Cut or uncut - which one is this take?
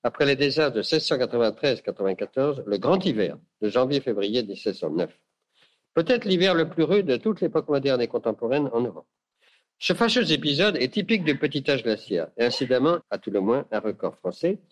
cut